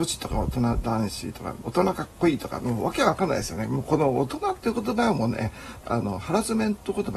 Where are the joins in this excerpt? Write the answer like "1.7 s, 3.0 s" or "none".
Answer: 1.6 s, 5.8 s